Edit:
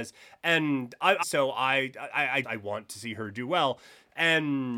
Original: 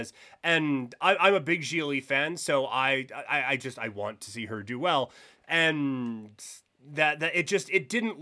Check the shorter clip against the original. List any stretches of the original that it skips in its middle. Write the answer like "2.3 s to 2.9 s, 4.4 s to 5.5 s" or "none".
1.2 s to 2.4 s, 3.6 s to 3.8 s